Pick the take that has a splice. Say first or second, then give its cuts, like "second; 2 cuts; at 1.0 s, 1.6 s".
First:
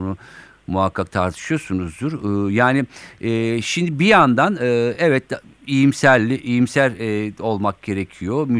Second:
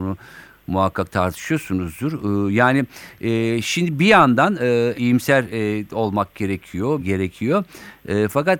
second; 2 cuts; at 4.9 s, 7.0 s